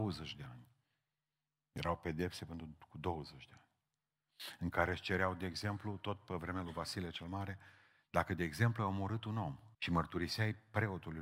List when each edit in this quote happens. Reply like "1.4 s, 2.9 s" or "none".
9.7 s